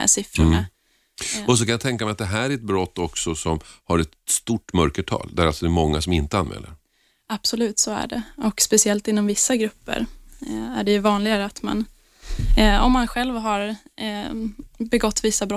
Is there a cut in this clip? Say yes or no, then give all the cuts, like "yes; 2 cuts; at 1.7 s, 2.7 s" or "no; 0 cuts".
no; 0 cuts